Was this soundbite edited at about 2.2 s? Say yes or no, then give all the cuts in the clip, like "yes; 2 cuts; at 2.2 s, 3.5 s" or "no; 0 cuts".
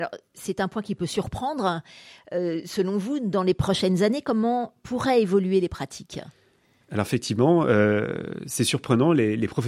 no; 0 cuts